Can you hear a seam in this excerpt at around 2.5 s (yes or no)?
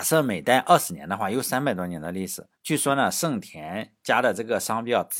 yes